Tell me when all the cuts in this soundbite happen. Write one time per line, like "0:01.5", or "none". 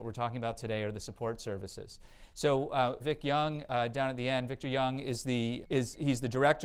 0:03.0
0:05.6